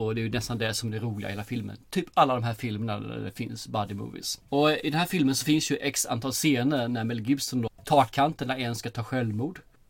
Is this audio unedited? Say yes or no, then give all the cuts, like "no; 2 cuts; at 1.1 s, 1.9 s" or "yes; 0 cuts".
no; 2 cuts; at 4.5 s, 7.7 s